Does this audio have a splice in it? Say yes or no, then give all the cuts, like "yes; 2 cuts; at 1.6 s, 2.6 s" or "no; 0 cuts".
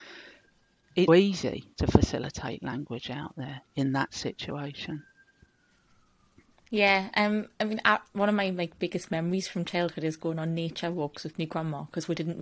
yes; 1 cut; at 1.1 s